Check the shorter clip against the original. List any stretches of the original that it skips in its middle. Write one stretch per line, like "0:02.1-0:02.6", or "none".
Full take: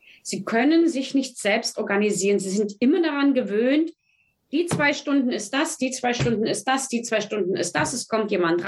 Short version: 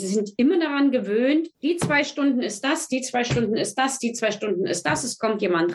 0:04.0-0:04.4